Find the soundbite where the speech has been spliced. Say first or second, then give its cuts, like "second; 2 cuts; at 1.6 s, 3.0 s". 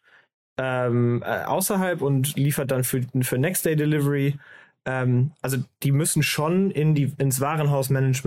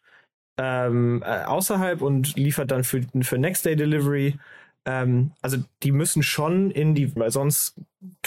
second; 1 cut; at 7.2 s